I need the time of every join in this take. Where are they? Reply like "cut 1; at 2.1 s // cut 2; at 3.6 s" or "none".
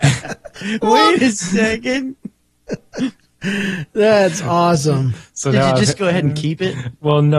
none

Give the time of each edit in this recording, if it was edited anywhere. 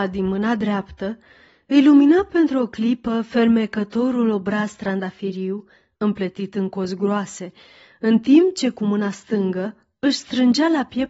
cut 1; at 5.9 s

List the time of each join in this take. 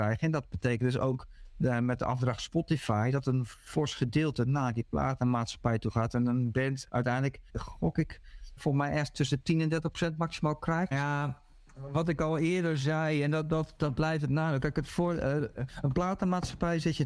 cut 1; at 7.5 s // cut 2; at 8.6 s // cut 3; at 10.9 s

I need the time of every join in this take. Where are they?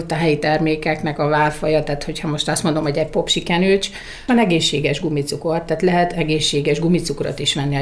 none

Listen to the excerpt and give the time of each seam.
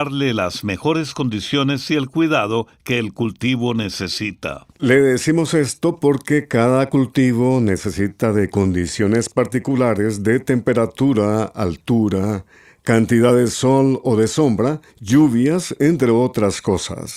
cut 1; at 4.7 s // cut 2; at 14.9 s

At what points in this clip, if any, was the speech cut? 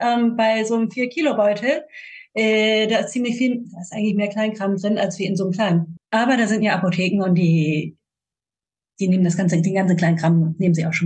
none

